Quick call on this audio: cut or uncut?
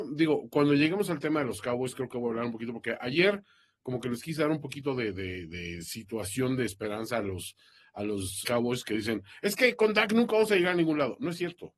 cut